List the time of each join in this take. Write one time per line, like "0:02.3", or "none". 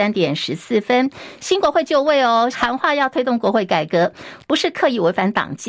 0:02.5
0:04.4

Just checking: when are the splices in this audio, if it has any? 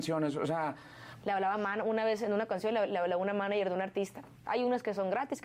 0:01.2
0:04.4

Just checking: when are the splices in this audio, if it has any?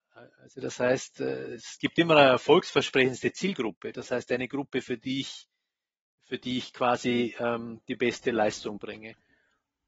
none

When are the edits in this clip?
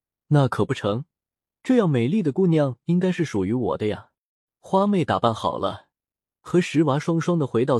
0:04.5

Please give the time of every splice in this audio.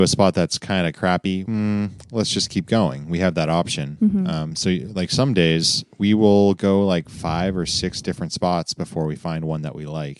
0:01.5

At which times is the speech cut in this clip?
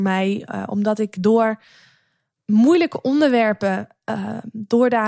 none

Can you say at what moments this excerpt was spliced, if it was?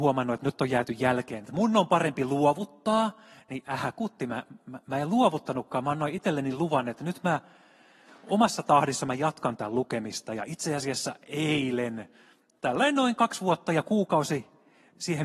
none

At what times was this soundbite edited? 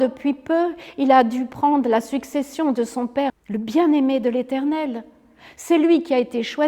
0:03.3

